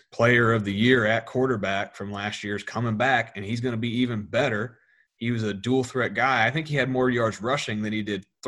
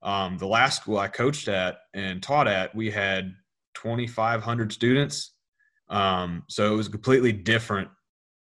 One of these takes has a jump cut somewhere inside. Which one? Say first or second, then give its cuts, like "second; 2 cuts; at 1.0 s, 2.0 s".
second; 1 cut; at 5.8 s